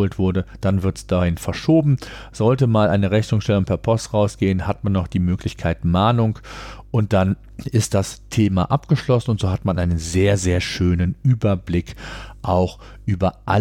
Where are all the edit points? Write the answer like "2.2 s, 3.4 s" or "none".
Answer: none